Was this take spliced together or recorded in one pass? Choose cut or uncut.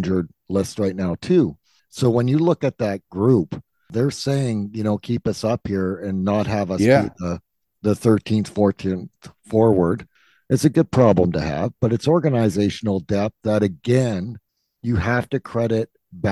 uncut